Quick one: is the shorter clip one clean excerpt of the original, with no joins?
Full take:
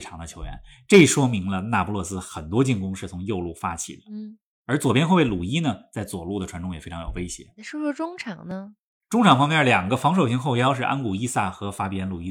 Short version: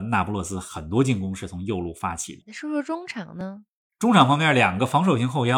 no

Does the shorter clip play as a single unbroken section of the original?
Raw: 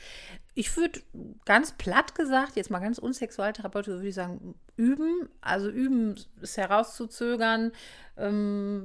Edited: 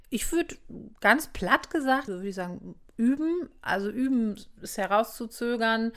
no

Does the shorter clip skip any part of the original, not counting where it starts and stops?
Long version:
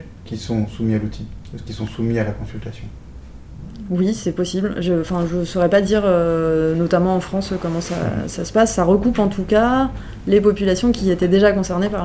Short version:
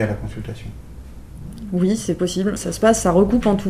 yes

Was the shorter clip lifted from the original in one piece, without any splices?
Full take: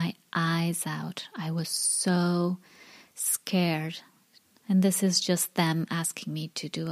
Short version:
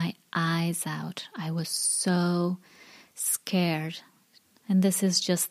yes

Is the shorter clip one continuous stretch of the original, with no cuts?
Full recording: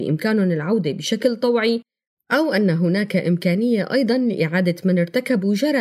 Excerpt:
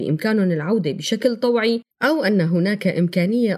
no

